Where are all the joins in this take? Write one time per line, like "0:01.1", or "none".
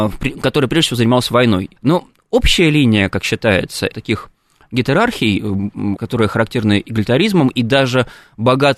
0:01.8
0:03.9
0:06.0